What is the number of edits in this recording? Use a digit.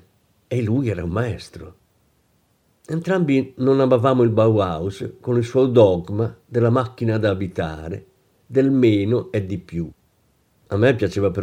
0